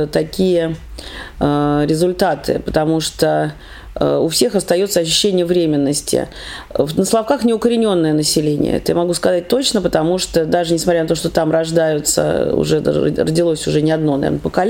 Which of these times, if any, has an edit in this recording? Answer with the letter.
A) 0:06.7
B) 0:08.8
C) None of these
C